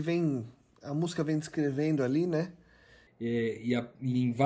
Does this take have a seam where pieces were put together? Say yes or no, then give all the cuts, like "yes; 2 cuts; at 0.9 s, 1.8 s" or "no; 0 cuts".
yes; 1 cut; at 3.1 s